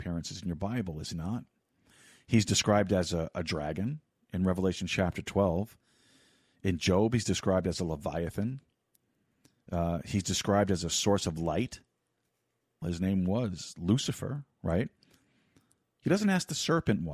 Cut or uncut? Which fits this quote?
cut